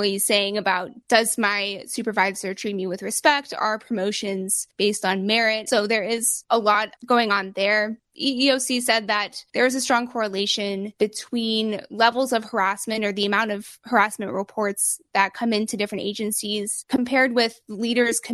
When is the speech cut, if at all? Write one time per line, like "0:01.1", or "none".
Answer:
0:05.7